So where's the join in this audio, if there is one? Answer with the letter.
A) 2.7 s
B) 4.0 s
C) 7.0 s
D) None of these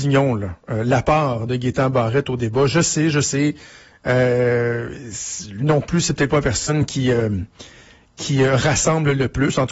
D